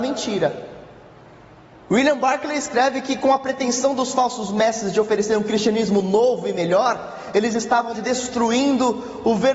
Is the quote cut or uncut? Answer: cut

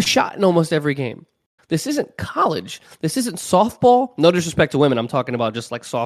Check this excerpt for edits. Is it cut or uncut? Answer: cut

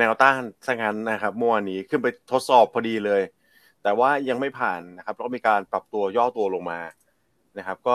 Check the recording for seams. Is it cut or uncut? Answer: uncut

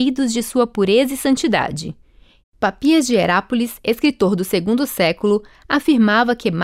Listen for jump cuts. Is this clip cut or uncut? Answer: cut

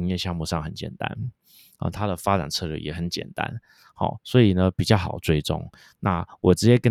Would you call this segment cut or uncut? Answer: uncut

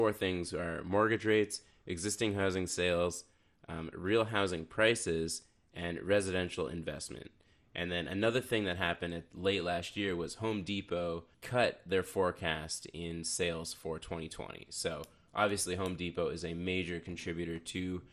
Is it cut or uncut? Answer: uncut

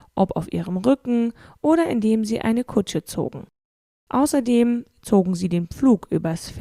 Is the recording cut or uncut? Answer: uncut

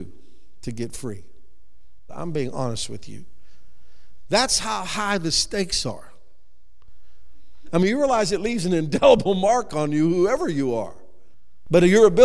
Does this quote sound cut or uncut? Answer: cut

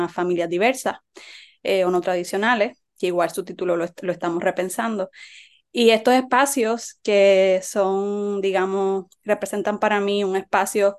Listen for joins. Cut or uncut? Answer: uncut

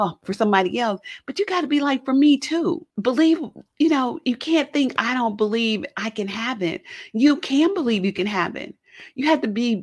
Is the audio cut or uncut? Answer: cut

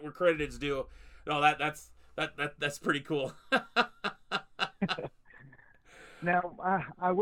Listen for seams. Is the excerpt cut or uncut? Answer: uncut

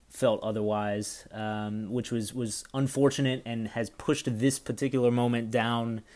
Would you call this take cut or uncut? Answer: uncut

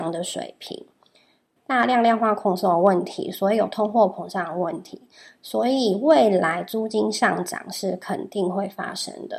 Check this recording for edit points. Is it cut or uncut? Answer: cut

